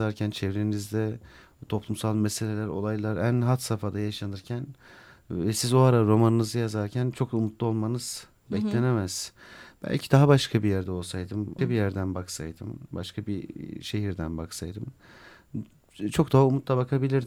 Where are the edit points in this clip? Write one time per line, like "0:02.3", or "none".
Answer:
0:11.6